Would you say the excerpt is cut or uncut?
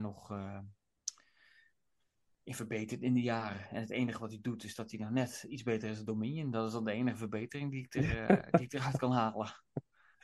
uncut